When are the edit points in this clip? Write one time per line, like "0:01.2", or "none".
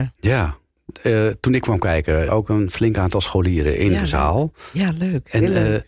0:02.3